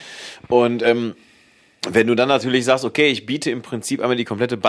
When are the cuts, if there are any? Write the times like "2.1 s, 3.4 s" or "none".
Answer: none